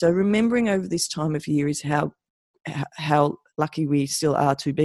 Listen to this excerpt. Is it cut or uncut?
uncut